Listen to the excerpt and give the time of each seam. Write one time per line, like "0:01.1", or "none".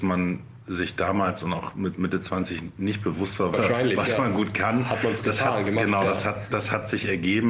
0:03.5